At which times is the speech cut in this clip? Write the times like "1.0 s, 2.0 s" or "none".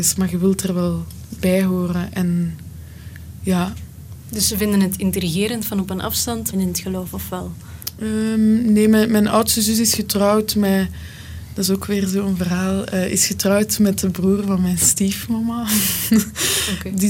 6.5 s